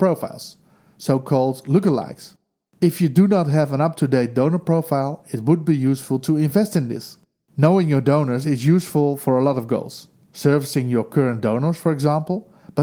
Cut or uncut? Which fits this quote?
uncut